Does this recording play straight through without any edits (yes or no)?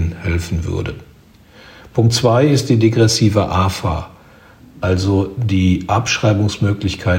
yes